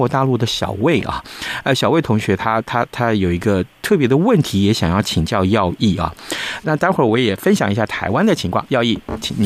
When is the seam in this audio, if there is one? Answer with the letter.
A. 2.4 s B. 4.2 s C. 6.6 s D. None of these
C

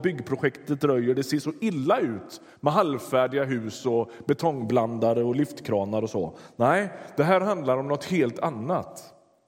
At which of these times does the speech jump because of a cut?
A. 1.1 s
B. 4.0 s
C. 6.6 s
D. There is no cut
D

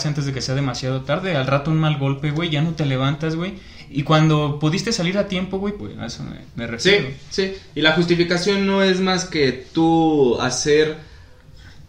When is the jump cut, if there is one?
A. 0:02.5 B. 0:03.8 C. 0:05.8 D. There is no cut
C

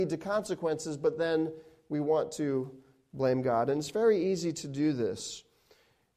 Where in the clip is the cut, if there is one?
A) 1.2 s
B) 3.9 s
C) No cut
C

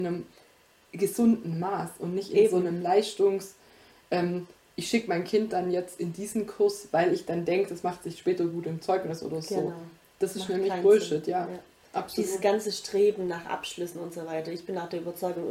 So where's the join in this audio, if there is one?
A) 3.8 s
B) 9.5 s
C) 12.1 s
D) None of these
D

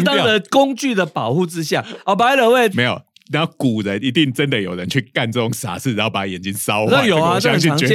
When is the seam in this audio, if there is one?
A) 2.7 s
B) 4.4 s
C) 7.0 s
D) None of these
A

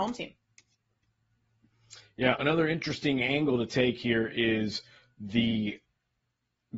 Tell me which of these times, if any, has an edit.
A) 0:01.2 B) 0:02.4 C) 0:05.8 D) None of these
B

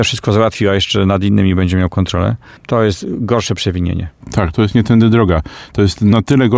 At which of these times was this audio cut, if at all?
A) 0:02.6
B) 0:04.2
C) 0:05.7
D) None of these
A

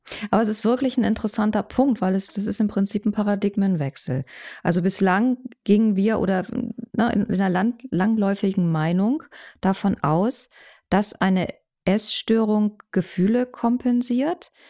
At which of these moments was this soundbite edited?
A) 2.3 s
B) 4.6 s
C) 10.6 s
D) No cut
A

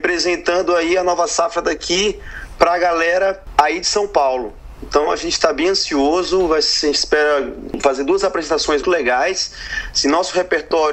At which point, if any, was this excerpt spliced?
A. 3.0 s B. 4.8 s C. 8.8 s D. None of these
C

